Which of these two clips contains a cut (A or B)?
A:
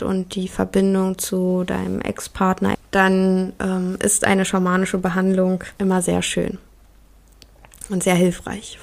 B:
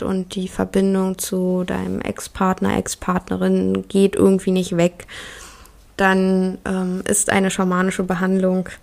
A